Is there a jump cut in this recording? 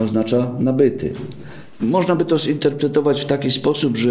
yes; 1 cut; at 1.8 s

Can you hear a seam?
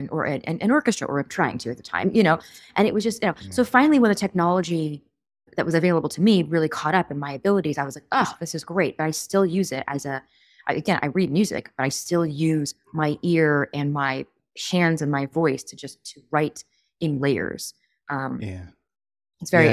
no; 0 cuts

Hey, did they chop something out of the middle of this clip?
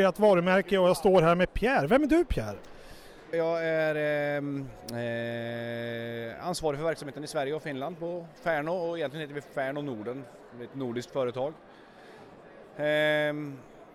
yes; 1 cut; at 3.3 s

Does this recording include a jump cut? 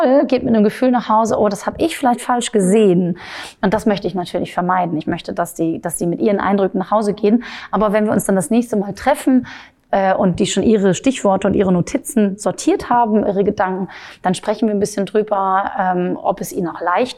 no; 0 cuts

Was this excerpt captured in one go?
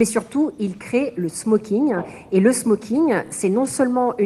yes; 0 cuts

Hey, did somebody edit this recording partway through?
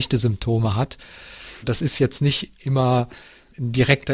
no; 0 cuts

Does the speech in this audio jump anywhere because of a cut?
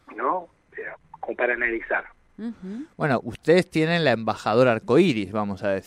no; 0 cuts

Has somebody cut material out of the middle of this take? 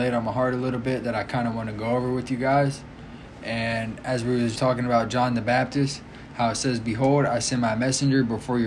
yes; 1 cut; at 4.6 s

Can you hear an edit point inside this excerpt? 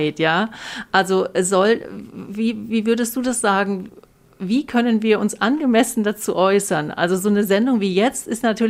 no; 0 cuts

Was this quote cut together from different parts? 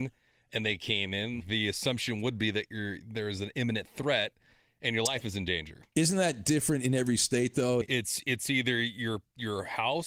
yes; 2 cuts; at 1.4 s, 7.8 s

